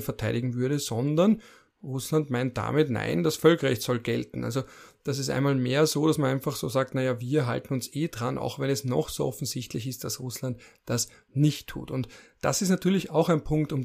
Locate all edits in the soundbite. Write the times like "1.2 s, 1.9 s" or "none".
none